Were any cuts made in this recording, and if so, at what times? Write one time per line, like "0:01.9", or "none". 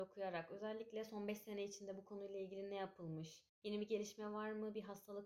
none